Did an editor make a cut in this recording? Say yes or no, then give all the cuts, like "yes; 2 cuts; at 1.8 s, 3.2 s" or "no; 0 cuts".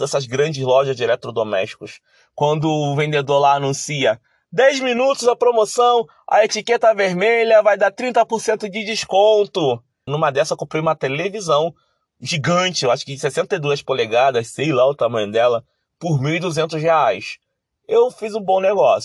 yes; 1 cut; at 10.1 s